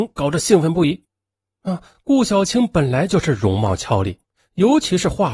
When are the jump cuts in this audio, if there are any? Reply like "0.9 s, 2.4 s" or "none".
none

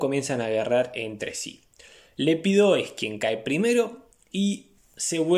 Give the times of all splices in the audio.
none

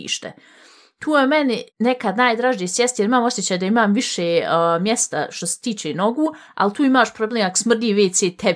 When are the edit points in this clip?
1.7 s

